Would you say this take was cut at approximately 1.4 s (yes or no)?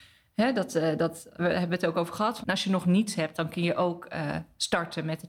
yes